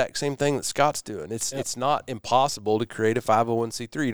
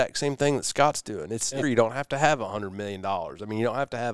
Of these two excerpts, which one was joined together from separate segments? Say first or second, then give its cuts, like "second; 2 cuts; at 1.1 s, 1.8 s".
second; 1 cut; at 1.6 s